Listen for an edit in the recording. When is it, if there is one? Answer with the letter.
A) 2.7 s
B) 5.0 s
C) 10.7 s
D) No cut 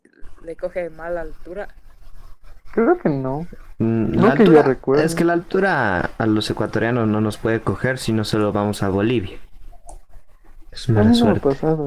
C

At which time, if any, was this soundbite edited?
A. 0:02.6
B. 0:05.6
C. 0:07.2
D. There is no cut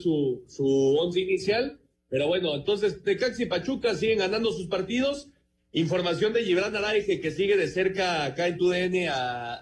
B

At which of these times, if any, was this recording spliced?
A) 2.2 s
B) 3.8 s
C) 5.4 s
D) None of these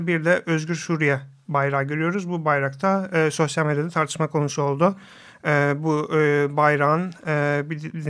D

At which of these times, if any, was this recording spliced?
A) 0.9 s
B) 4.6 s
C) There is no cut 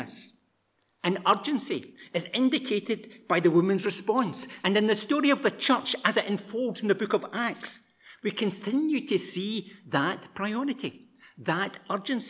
B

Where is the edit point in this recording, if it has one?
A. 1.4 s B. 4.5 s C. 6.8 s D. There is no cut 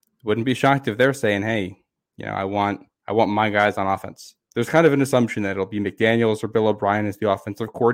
B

